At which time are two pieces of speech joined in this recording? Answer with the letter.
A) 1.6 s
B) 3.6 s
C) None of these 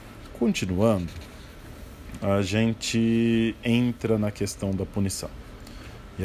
C